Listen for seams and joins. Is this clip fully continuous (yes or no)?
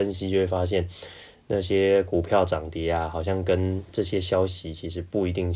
yes